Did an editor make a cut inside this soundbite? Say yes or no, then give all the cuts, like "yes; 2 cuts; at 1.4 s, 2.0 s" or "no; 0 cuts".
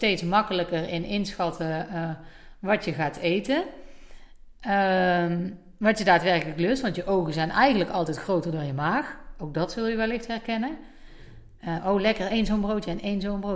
no; 0 cuts